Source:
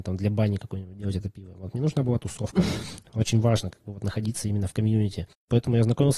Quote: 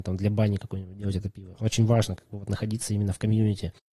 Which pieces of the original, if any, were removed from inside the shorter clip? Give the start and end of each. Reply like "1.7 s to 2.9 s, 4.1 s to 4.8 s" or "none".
1.5 s to 3.1 s

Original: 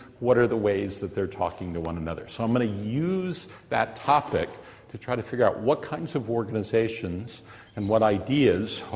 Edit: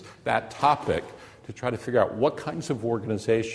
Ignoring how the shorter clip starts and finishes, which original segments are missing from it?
none

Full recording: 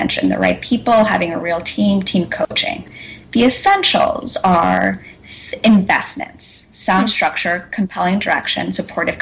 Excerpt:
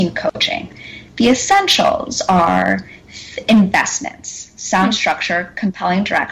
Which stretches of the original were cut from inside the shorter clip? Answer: none

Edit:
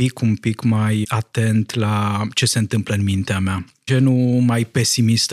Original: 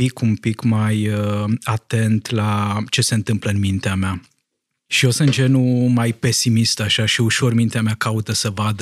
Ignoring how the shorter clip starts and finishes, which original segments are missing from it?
1.0 s to 1.6 s, 4.4 s to 5.4 s

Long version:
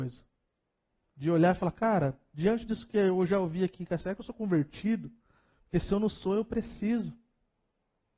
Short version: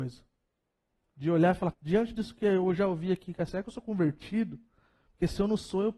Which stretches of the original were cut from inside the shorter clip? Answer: 1.7 s to 2.2 s

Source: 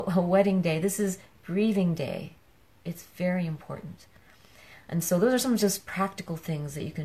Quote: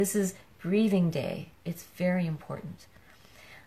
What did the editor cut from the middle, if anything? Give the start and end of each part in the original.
2.4 s to 2.8 s

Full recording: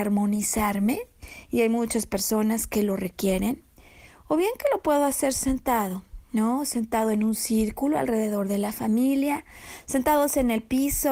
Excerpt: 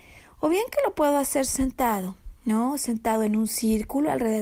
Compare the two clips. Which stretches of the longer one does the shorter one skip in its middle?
none

